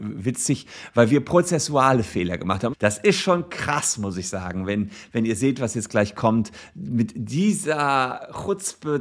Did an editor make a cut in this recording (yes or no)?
yes